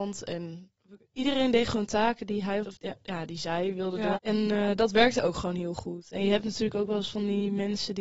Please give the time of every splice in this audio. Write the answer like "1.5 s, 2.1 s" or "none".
2.6 s, 4.1 s

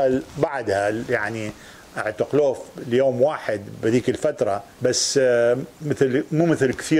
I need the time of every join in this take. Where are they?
4.7 s

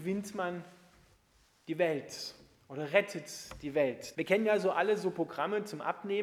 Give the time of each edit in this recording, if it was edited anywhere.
4.1 s

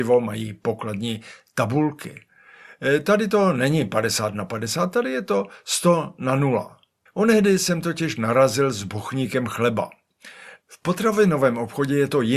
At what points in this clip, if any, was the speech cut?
7.1 s, 10.6 s

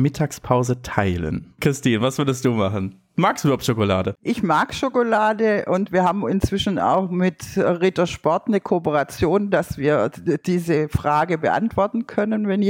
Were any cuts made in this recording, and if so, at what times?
none

